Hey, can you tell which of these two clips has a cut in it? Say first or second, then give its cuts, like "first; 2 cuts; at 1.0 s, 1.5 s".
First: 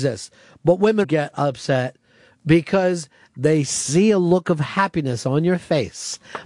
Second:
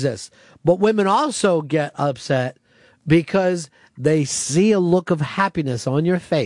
first; 1 cut; at 1.0 s